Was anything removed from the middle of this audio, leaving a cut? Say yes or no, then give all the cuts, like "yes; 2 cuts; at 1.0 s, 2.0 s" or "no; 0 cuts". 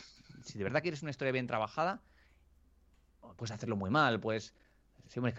yes; 1 cut; at 3.4 s